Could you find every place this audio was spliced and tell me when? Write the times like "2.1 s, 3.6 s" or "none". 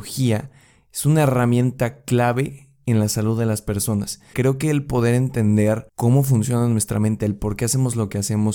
4.3 s, 5.9 s